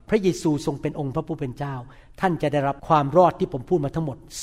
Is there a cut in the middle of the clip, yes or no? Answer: yes